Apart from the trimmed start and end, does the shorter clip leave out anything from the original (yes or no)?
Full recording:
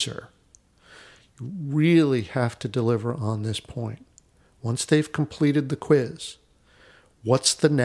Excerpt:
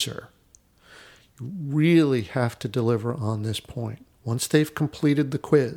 yes